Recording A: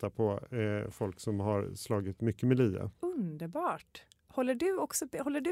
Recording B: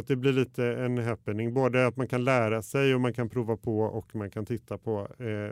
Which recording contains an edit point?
A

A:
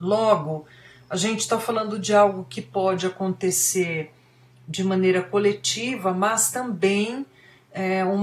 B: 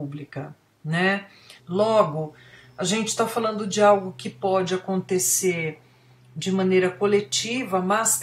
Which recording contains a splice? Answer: B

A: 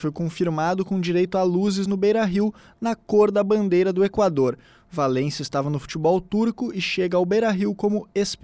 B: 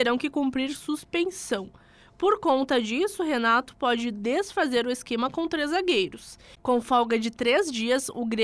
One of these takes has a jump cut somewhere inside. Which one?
B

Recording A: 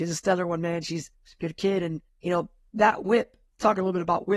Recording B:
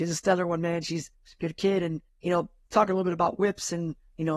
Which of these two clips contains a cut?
B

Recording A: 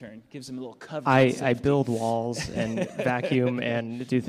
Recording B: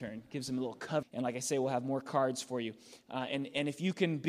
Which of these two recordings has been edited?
B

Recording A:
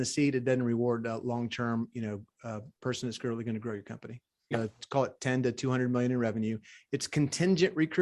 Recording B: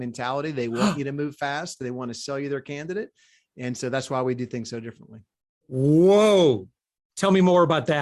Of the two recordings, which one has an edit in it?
A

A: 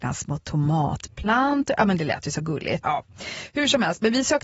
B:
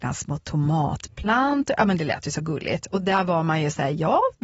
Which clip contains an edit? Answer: A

